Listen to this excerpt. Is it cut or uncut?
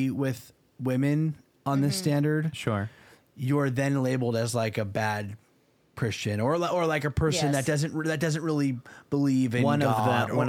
uncut